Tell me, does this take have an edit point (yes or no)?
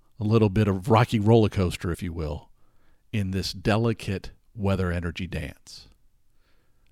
no